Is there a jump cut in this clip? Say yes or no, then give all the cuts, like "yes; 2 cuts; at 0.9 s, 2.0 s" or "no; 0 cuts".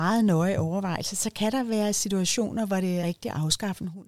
yes; 1 cut; at 3.0 s